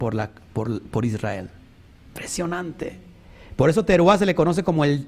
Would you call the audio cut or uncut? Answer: uncut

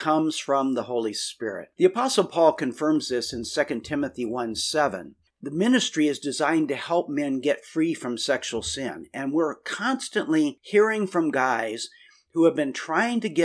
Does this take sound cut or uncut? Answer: cut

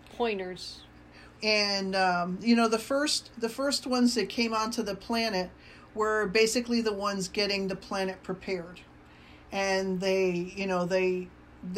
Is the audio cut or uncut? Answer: cut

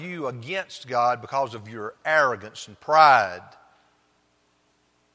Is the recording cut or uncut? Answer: uncut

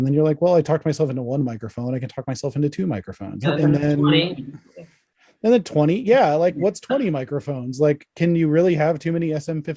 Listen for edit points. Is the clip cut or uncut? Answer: cut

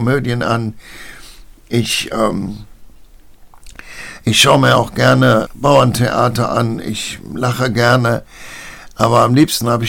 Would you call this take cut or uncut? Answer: cut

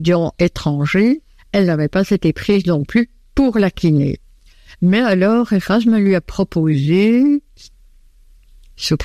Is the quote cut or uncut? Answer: uncut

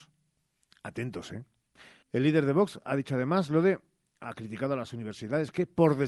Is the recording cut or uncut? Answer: cut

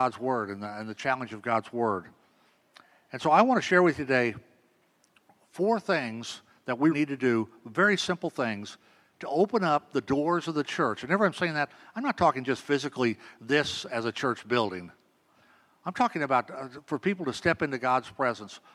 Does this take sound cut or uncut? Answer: cut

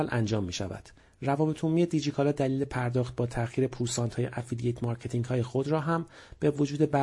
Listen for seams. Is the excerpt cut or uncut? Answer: uncut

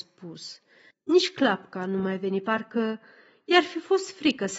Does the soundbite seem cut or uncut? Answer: cut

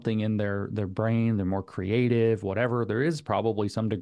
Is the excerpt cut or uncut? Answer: uncut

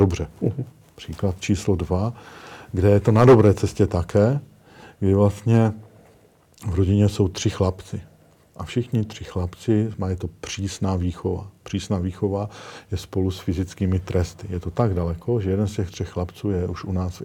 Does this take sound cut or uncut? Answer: uncut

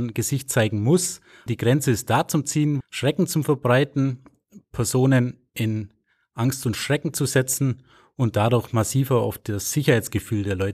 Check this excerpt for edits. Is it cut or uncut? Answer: cut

